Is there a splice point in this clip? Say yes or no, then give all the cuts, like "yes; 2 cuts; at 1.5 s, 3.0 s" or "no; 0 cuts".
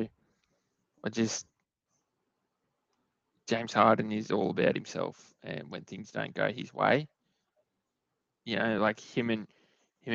no; 0 cuts